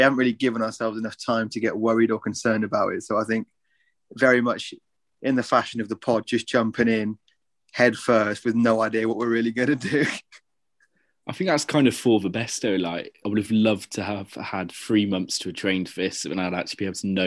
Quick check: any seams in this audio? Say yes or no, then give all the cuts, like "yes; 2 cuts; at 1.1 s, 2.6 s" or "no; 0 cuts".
yes; 1 cut; at 13.2 s